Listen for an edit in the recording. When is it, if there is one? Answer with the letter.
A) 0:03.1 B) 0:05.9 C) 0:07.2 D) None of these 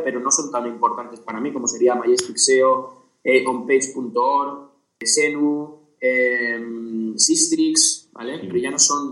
D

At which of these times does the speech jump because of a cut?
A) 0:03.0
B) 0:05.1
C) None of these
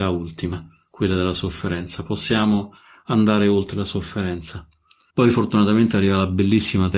B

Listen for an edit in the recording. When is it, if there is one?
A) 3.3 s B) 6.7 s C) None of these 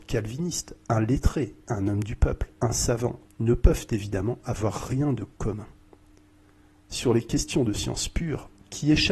A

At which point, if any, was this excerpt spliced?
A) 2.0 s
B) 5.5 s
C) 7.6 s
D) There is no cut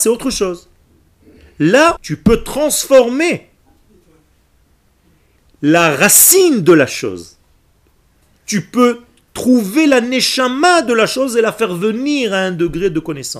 A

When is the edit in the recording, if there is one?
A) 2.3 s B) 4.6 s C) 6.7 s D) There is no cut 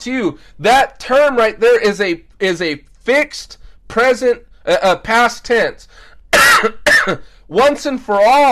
A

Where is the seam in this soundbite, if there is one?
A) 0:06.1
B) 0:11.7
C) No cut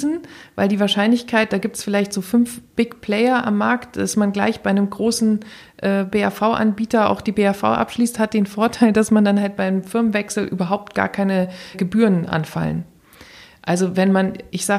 B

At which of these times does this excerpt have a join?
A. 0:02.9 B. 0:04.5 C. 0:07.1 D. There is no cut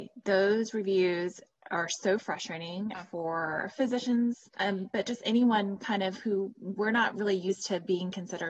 A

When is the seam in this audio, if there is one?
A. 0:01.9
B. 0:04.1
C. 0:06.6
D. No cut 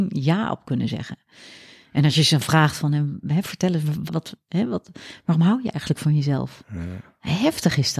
B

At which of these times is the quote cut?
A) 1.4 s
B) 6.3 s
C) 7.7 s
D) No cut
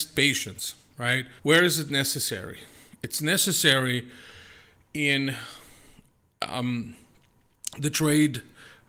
A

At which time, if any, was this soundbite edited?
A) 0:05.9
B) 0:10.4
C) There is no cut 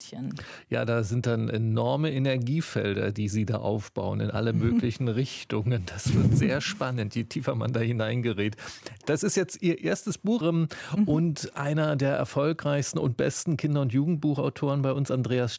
B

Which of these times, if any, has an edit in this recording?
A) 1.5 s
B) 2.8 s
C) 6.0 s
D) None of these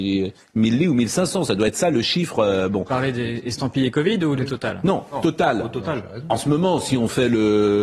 D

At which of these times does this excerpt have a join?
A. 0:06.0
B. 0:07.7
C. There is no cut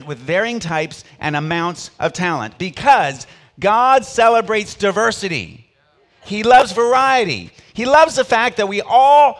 C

